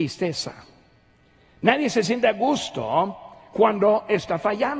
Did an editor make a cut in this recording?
no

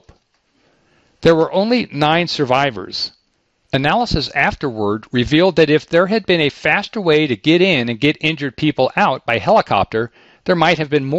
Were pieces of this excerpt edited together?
no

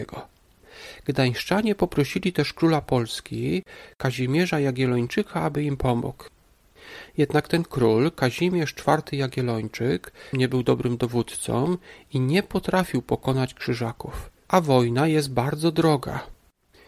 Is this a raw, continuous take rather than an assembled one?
no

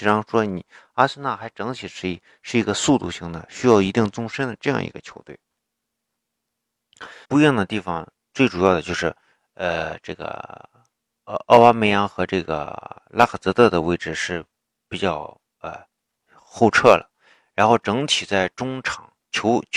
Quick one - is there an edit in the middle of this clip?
yes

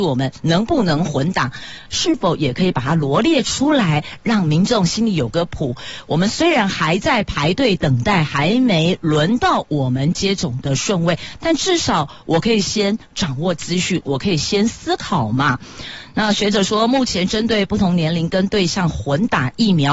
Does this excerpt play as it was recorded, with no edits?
no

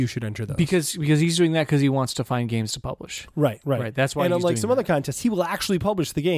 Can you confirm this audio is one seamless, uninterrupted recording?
yes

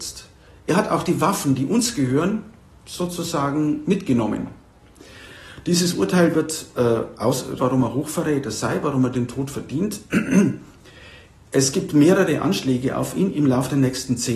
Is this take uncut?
no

